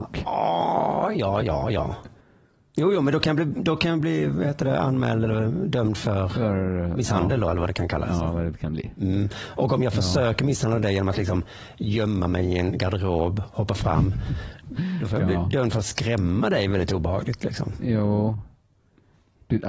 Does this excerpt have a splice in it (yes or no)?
yes